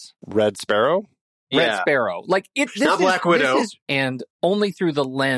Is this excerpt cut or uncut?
cut